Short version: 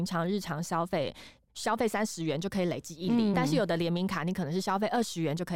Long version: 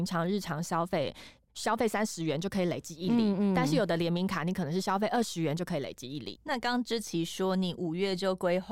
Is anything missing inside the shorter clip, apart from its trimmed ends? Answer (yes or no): yes